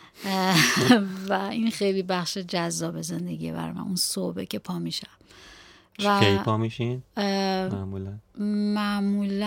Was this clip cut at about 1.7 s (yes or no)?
yes